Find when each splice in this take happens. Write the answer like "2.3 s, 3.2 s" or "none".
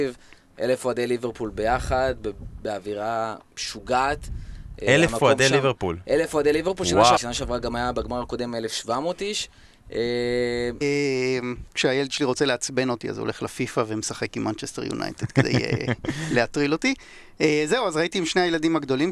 7.2 s, 10.8 s